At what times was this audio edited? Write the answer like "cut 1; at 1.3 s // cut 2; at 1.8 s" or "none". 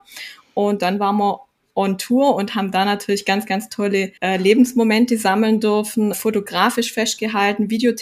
cut 1; at 4.2 s // cut 2; at 6.1 s